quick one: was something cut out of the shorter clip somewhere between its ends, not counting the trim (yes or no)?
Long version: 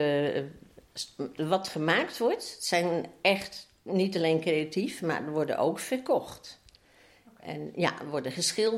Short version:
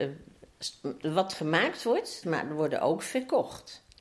yes